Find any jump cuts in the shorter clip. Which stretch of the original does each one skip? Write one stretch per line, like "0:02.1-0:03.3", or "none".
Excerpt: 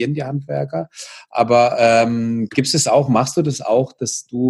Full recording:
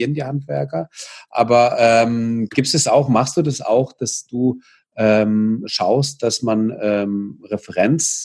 none